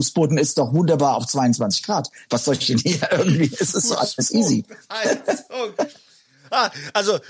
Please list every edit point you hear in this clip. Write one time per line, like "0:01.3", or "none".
none